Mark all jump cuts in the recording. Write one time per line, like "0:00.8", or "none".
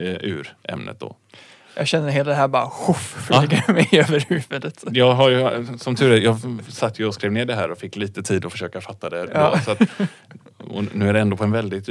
none